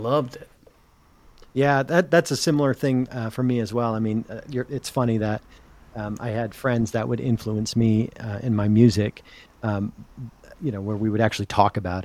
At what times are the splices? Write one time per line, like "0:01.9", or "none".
none